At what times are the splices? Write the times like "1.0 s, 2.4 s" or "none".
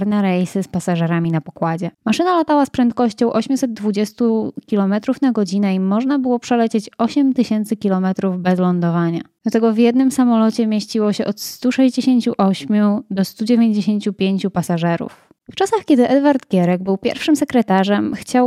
none